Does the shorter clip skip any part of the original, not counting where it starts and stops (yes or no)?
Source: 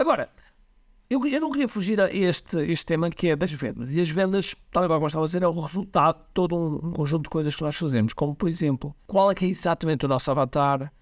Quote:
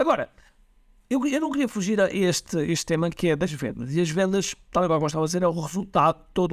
no